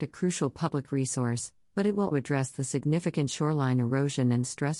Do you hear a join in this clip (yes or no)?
yes